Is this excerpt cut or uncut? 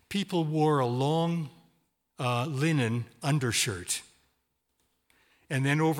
uncut